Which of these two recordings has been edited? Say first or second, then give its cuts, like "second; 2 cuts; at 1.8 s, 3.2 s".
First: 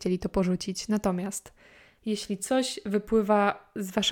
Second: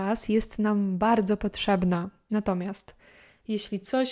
second; 1 cut; at 2.3 s